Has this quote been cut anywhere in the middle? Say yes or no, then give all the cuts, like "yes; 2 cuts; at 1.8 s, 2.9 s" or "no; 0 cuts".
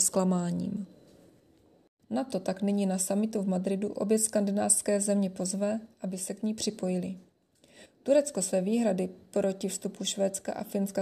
yes; 2 cuts; at 2.0 s, 7.9 s